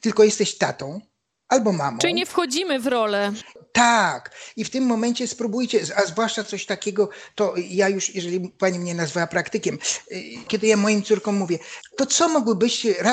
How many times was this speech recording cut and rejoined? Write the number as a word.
two